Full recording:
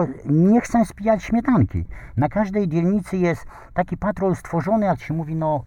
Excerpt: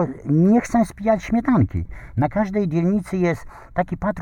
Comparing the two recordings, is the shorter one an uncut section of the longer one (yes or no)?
yes